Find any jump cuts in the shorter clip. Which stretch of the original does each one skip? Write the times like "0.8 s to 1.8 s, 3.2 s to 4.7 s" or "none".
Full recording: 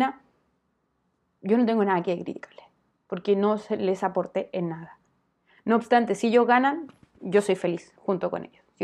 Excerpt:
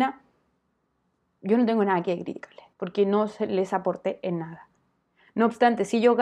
2.7 s to 3.0 s